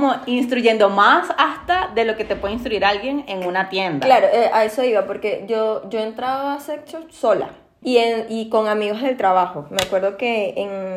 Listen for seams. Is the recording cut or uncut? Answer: cut